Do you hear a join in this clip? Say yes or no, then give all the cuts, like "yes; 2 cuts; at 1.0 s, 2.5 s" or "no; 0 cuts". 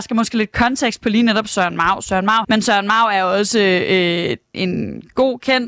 yes; 2 cuts; at 2.4 s, 4.5 s